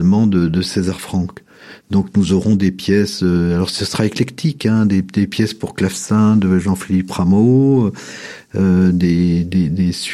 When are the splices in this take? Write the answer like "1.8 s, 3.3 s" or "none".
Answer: 1.8 s